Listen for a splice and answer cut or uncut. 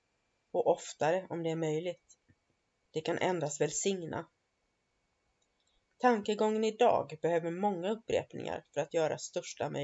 cut